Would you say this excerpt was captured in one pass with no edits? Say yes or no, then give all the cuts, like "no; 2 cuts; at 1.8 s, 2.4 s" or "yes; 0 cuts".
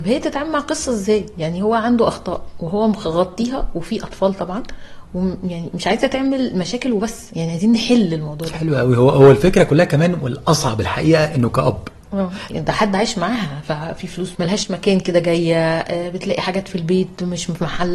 no; 2 cuts; at 12.5 s, 14.3 s